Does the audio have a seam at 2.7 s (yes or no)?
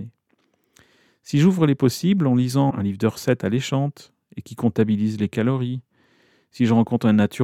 yes